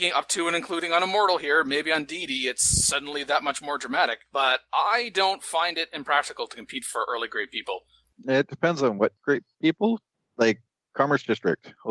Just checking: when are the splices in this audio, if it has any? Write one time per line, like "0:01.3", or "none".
none